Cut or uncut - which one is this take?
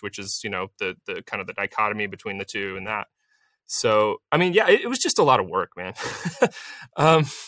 uncut